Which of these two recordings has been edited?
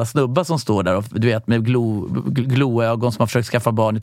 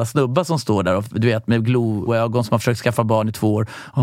second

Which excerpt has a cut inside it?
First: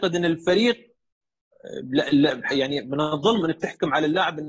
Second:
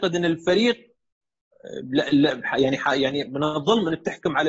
first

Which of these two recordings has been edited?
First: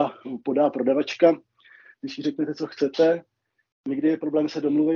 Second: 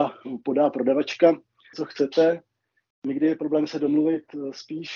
second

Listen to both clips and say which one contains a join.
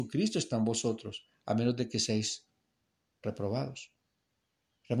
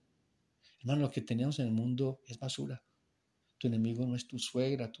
second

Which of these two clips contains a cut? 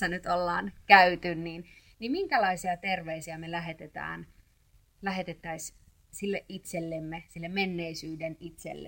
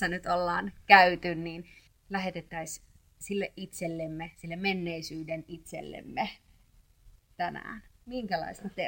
second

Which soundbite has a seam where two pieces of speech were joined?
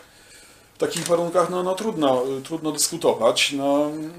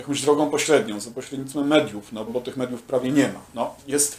second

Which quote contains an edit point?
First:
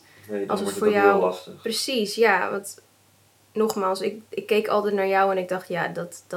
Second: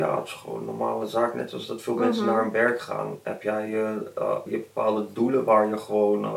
second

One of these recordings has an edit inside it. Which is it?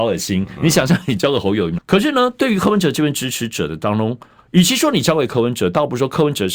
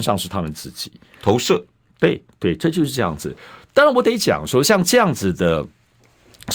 first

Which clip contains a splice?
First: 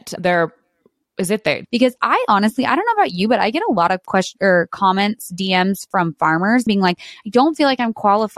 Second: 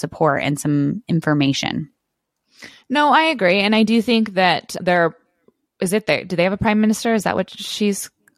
first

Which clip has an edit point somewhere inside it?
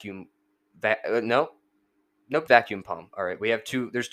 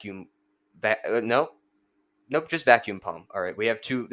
first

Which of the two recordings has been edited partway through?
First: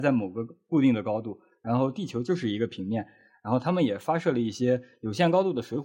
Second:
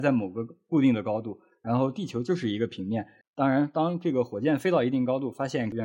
second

